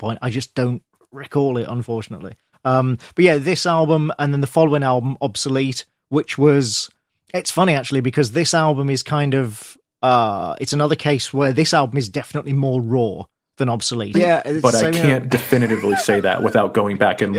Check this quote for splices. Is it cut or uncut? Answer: cut